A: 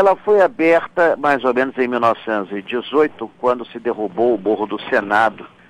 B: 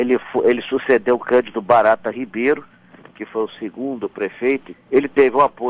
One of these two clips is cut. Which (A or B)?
B